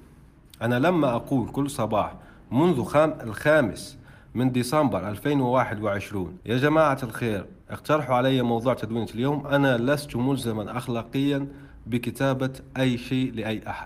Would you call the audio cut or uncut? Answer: cut